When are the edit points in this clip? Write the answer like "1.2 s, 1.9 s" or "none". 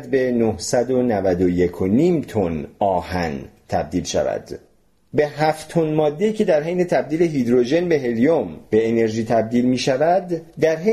none